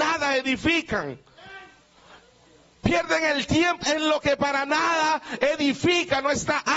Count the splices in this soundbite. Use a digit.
1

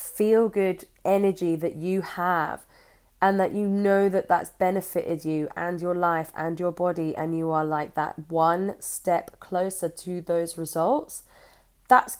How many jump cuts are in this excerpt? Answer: 0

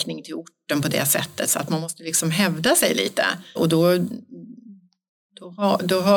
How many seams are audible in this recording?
1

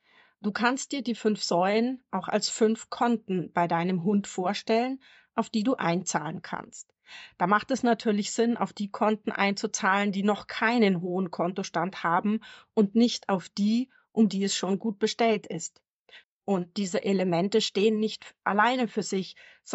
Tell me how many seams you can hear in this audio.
1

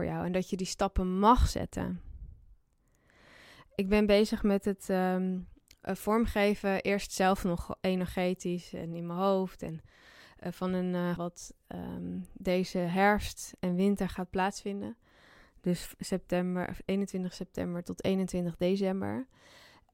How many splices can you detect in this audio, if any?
1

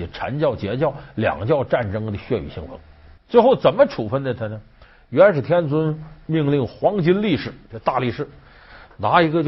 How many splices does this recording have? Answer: 0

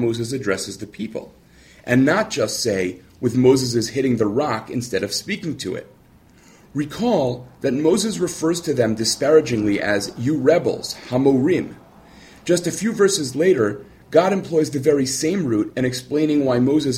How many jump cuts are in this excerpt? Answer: 0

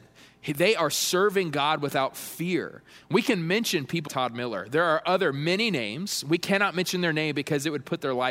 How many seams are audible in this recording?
1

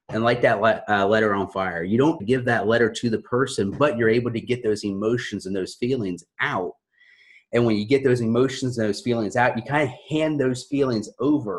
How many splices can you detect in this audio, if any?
1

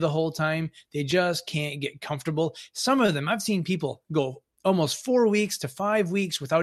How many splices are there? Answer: 0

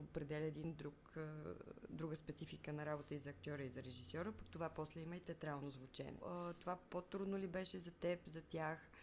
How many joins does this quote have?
1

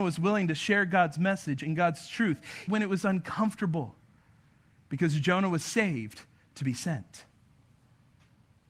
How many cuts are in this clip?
1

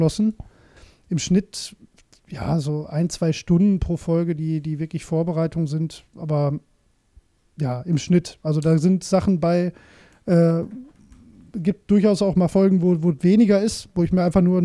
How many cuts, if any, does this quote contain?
0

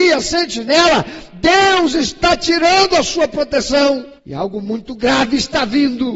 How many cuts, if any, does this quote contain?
1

